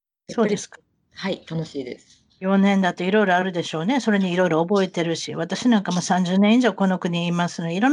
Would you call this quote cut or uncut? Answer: uncut